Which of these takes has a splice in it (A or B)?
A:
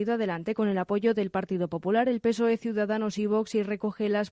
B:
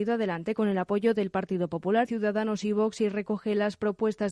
B